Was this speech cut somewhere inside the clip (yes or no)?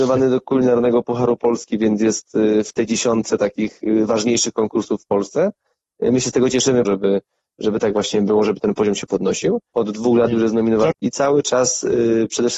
yes